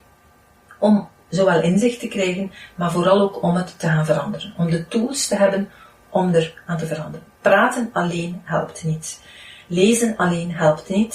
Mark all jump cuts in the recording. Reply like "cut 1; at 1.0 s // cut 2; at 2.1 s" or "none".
none